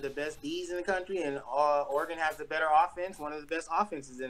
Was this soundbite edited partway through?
no; 0 cuts

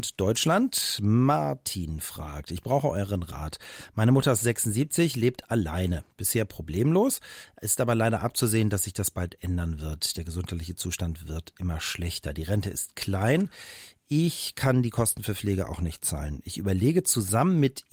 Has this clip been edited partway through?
no; 0 cuts

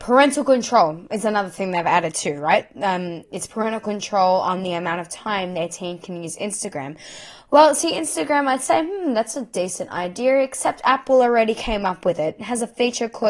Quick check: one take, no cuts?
yes; 0 cuts

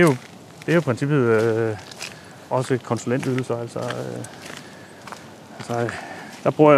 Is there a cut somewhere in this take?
no; 0 cuts

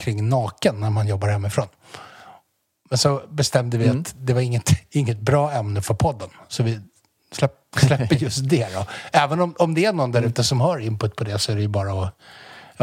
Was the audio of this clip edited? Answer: no; 0 cuts

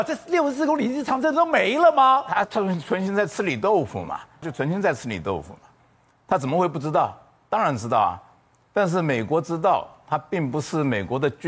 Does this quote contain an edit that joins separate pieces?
yes; 2 cuts; at 2.4 s, 4.4 s

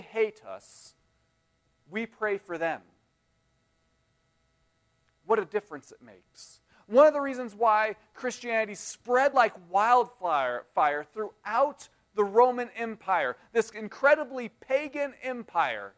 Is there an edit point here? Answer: no; 0 cuts

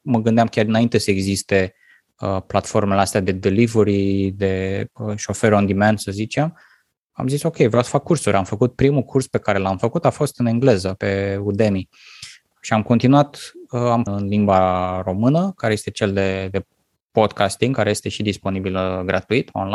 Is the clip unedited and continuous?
no; 2 cuts; at 11.0 s, 14.1 s

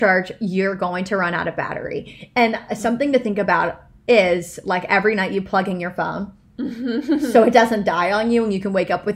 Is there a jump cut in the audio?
no; 0 cuts

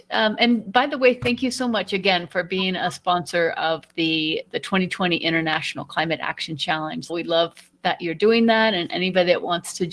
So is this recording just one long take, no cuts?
no; 1 cut; at 7.1 s

